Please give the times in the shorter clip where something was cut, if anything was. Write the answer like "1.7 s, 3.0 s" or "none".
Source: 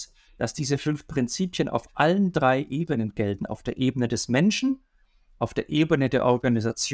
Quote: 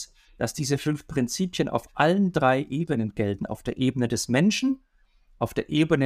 none